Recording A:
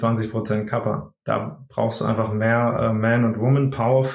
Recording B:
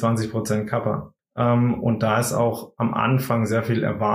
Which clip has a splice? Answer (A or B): B